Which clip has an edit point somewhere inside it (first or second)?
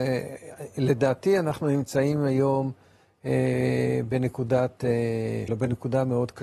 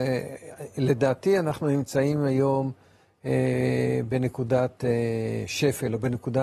first